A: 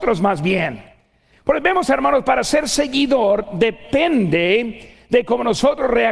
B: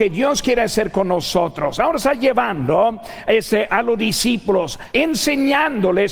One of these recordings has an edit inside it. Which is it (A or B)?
B